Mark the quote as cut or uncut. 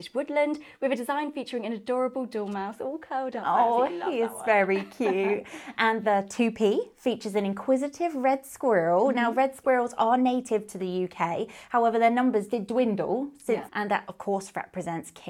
cut